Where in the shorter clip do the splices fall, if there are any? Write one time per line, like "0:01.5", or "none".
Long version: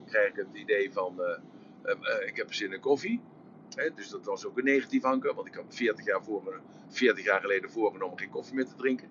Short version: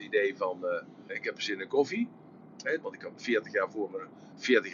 0:01.1
0:02.8